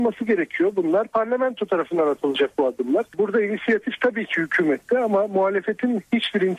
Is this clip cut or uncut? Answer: uncut